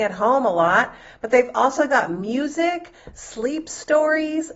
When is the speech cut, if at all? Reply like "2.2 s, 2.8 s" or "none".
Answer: none